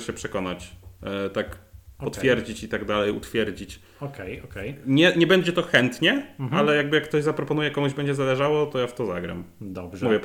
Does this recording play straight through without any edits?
yes; 0 cuts

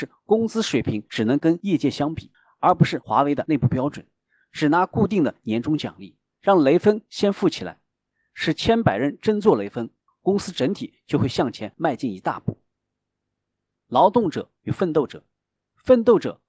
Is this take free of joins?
no; 2 cuts; at 6.3 s, 10.1 s

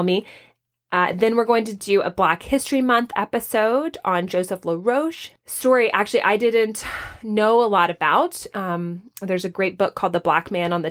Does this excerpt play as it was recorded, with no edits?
yes; 0 cuts

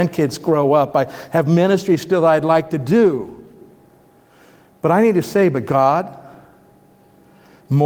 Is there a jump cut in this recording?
no; 0 cuts

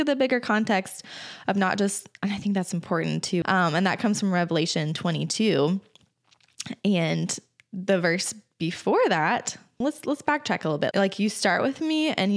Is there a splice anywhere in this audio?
yes; 3 cuts; at 3.4 s, 9.8 s, 10.9 s

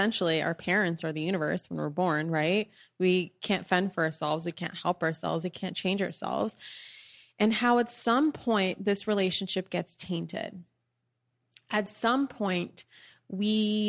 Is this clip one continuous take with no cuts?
no; 1 cut; at 5.4 s

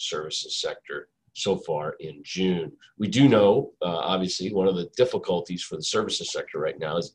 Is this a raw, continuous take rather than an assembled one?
yes; 0 cuts

